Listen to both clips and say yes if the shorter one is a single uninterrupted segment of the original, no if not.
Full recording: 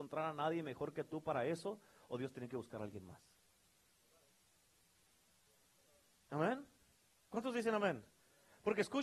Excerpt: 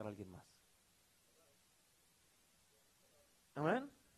yes